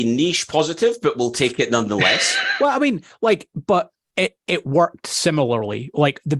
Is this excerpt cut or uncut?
uncut